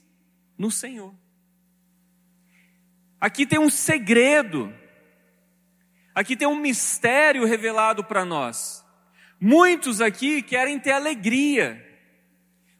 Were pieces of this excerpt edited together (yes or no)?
no